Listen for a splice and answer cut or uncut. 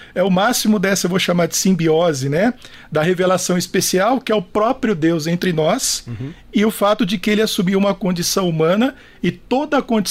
uncut